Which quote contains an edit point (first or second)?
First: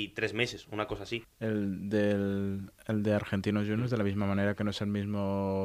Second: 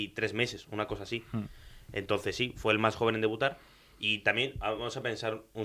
first